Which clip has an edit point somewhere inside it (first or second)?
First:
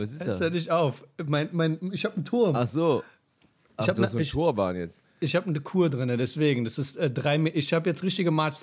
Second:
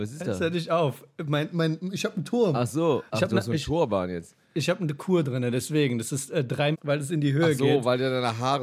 second